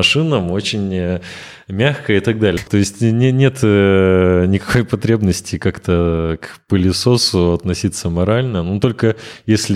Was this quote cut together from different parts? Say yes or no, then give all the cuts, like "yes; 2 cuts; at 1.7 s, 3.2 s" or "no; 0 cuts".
yes; 1 cut; at 2.6 s